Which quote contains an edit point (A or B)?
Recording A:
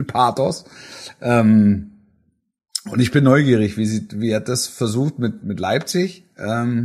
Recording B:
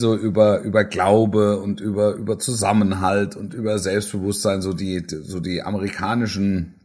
A